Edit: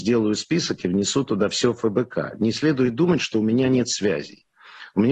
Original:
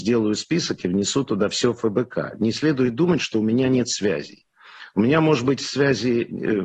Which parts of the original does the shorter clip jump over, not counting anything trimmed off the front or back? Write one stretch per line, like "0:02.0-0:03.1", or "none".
none